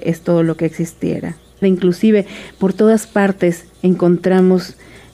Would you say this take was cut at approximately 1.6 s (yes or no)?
yes